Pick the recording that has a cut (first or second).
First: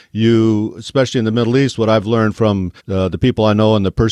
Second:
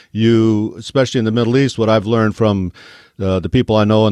first